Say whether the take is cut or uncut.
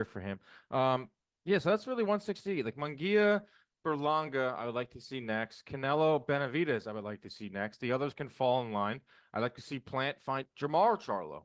uncut